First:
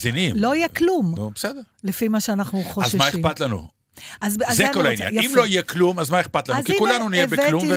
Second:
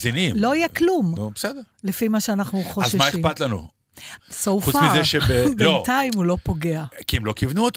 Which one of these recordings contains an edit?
second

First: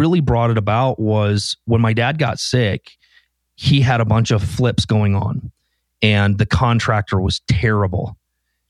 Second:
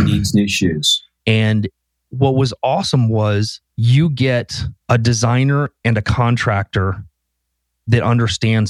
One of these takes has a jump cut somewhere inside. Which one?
second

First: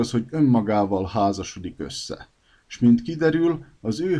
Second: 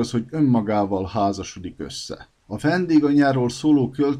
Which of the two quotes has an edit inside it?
second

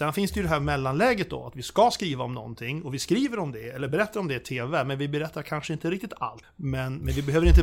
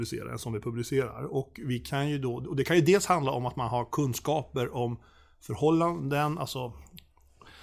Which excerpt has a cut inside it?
first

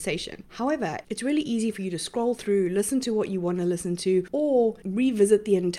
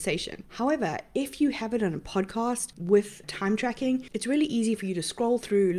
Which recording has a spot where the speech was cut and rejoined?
first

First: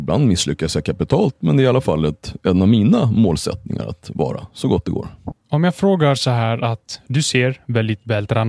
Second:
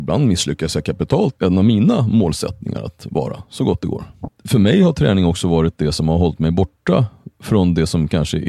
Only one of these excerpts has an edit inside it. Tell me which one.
second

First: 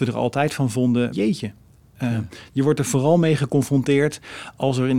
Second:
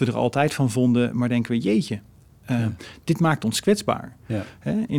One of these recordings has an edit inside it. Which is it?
first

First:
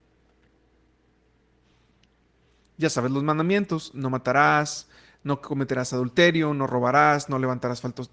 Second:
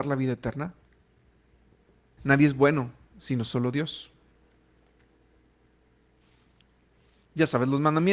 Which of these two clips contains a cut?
second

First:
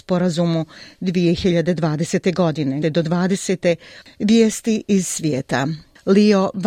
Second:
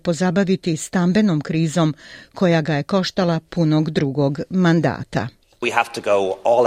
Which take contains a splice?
first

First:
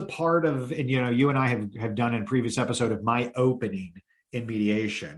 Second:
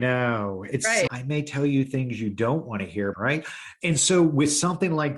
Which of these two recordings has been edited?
second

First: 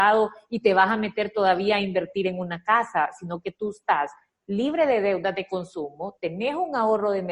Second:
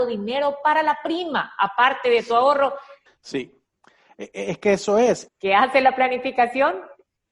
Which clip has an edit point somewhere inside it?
second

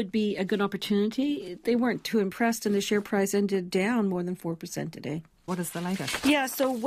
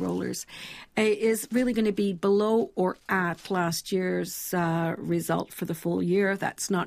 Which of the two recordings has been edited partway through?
first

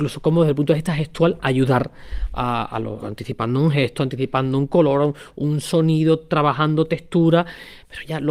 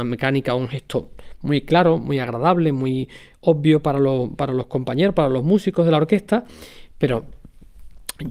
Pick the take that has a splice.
first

